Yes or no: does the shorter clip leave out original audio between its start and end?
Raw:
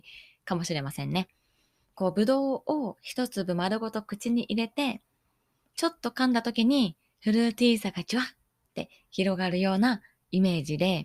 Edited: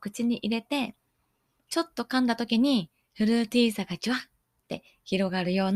no